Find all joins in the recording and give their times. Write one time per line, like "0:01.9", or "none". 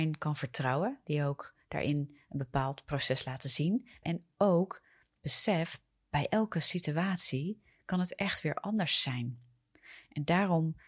0:04.0